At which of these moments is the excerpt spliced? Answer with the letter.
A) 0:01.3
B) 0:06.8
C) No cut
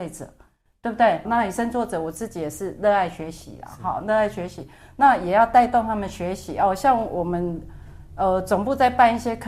A